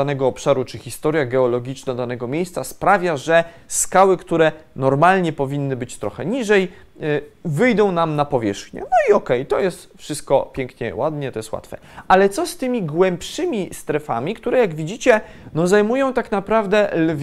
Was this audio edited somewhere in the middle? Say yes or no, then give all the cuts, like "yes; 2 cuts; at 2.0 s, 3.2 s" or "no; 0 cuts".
no; 0 cuts